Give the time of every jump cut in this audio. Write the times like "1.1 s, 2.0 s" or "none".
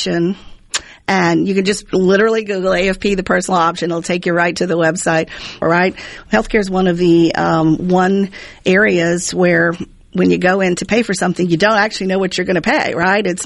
5.6 s